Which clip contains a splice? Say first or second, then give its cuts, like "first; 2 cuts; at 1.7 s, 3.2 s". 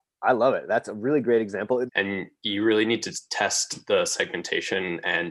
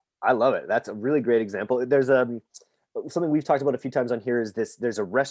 first; 1 cut; at 1.9 s